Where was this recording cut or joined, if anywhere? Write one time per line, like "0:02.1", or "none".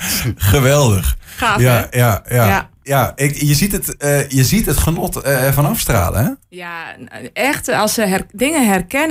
0:02.8